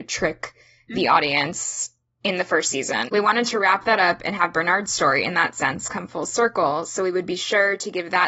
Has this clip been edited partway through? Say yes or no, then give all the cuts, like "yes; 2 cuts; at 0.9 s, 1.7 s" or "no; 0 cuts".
yes; 1 cut; at 3.1 s